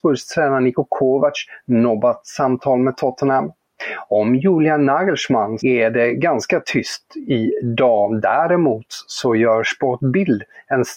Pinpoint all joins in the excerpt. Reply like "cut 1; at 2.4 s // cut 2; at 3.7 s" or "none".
cut 1; at 5.6 s